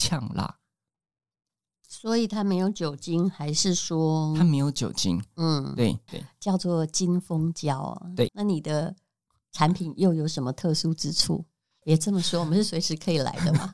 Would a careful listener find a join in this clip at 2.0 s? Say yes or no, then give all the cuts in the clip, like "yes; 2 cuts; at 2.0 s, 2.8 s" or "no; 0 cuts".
no; 3 cuts; at 6.1 s, 8.3 s, 11.8 s